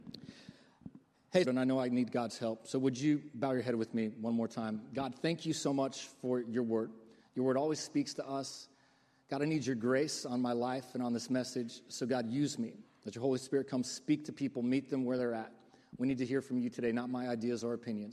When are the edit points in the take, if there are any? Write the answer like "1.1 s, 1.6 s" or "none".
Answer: 1.4 s